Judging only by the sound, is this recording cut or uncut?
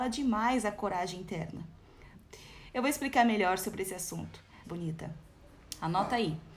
cut